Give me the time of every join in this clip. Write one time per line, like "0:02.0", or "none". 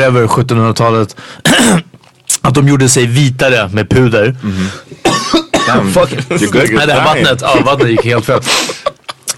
none